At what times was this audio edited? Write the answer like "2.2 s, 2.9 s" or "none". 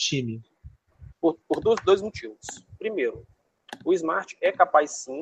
1.1 s